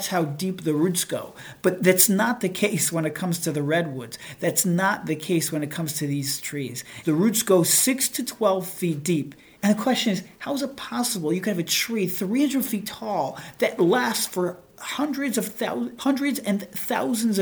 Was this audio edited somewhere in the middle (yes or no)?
yes